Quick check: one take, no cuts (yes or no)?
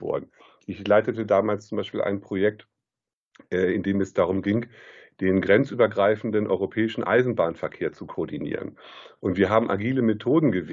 yes